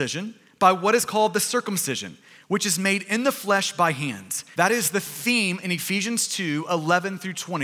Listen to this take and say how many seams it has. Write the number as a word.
one